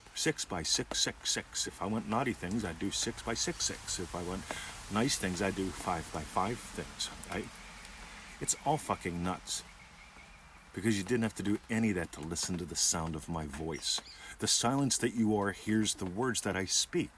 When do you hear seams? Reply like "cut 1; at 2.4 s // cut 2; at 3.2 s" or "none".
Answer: none